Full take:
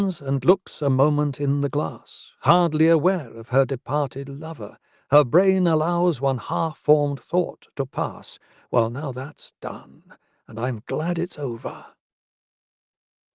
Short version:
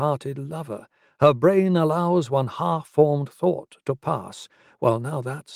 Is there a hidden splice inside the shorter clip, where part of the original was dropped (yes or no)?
no